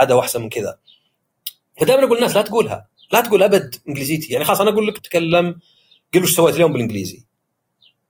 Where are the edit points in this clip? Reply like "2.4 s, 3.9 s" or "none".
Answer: 5.0 s